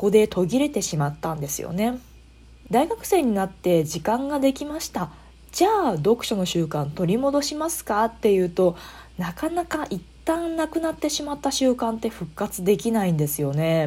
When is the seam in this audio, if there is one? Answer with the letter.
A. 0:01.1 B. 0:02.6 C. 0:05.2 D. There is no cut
B